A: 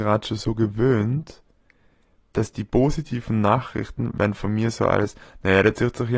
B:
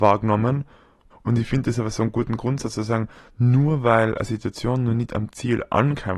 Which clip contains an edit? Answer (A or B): B